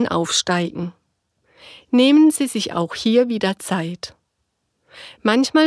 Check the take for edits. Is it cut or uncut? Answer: uncut